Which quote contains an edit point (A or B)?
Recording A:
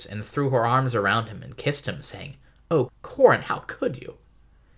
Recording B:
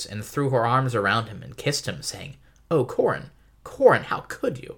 A